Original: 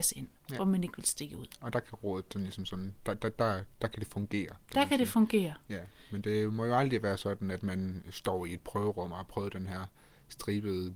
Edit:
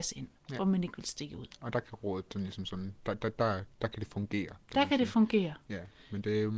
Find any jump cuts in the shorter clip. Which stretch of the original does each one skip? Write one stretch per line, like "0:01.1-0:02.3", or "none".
none